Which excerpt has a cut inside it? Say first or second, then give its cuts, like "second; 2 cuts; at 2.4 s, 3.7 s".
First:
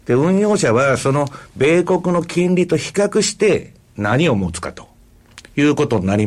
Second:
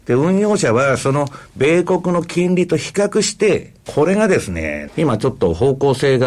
second; 2 cuts; at 3.9 s, 4.9 s